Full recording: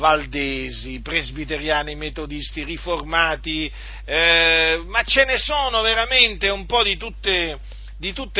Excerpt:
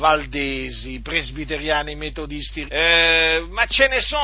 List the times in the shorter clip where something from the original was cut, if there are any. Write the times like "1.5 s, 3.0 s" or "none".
2.7 s